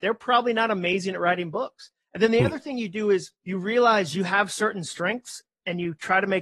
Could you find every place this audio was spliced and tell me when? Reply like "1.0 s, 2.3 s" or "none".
3.4 s